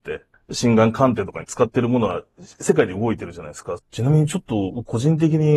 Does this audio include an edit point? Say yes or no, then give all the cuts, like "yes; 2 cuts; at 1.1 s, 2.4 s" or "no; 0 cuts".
yes; 1 cut; at 3.8 s